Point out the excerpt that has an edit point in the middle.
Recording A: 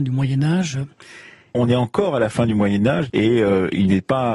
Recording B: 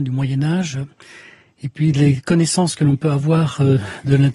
A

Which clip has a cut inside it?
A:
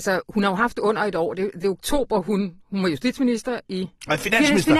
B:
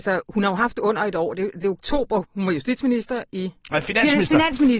B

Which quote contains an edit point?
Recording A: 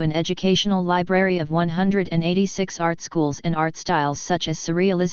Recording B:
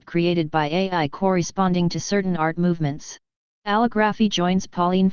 B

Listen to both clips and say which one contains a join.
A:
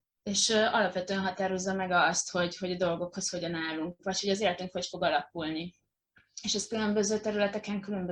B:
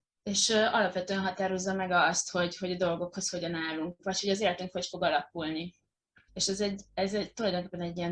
B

